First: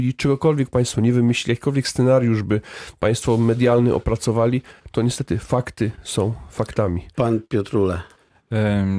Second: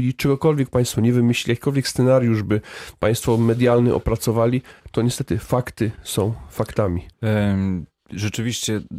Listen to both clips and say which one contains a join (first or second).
second